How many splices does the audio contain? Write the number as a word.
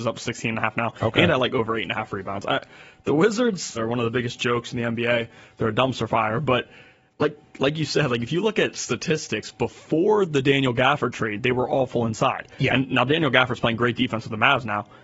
one